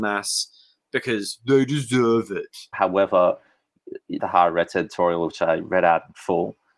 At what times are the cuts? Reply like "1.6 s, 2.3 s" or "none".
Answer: 2.7 s, 4.2 s